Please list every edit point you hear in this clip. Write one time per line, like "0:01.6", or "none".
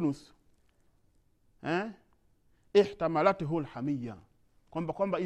none